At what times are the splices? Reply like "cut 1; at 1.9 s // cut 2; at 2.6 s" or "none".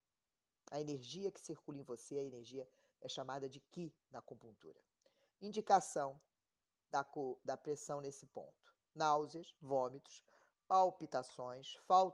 none